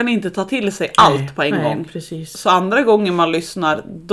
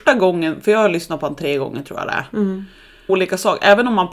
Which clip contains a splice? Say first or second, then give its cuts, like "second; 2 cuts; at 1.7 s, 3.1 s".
second; 1 cut; at 3.1 s